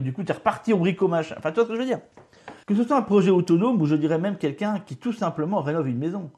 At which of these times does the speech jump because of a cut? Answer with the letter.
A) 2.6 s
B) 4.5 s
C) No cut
A